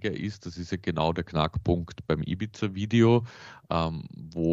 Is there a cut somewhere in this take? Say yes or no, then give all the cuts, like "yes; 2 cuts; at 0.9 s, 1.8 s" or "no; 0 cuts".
no; 0 cuts